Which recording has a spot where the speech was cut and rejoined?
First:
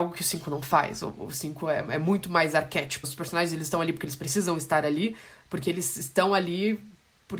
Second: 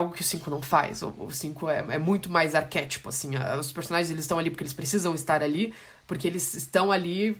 first; 1 cut; at 3.0 s

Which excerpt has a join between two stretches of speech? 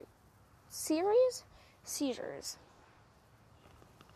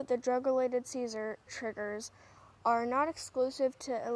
second; 1 cut; at 1.5 s

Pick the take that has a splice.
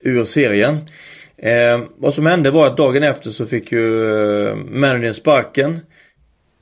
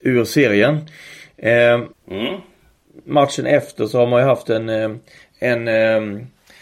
second; 1 cut; at 1.9 s

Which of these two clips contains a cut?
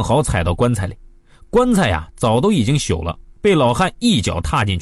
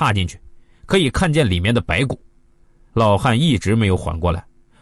second; 1 cut; at 2.9 s

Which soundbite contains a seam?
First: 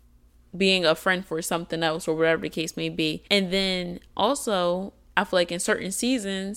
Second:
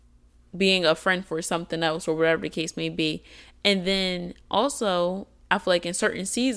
first; 1 cut; at 3.3 s

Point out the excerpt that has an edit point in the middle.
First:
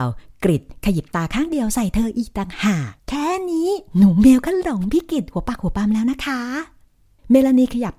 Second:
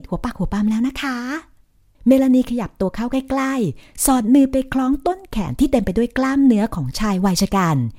first; 1 cut; at 3.0 s

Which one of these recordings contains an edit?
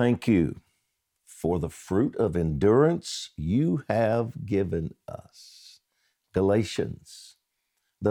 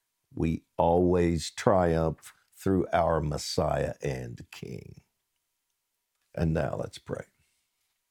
second; 1 cut; at 6.2 s

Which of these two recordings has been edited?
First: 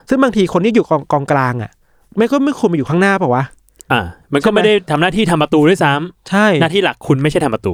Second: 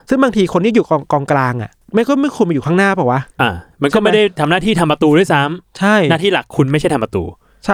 second; 2 cuts; at 1.8 s, 3.3 s

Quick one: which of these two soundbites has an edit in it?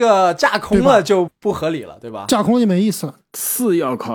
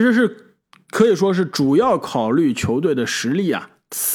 first; 2 cuts; at 1.3 s, 3.2 s

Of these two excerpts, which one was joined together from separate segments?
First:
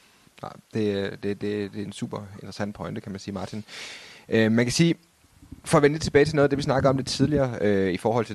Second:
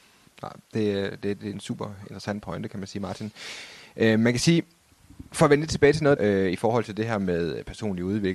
second; 2 cuts; at 1.4 s, 6.2 s

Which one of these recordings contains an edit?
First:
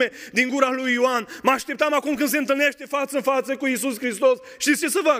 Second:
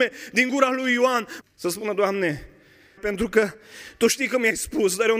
second; 2 cuts; at 1.4 s, 3.0 s

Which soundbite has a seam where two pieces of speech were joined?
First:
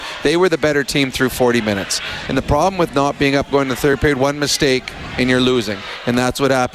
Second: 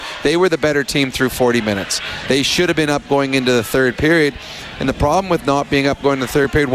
first; 1 cut; at 2.2 s

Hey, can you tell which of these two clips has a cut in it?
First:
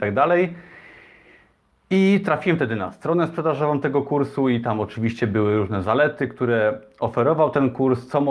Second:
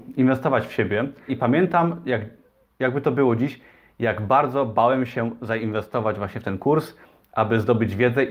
second; 1 cut; at 1.3 s

